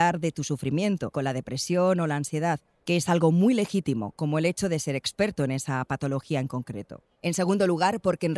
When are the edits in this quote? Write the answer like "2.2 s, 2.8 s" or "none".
1.1 s, 7.2 s